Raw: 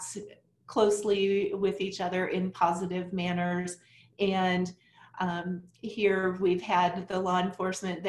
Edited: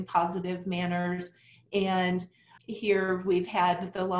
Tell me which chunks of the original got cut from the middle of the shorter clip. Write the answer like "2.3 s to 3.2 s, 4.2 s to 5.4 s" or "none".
5.0 s to 5.7 s